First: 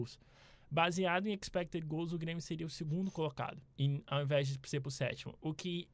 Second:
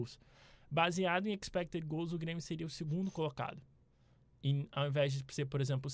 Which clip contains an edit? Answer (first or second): first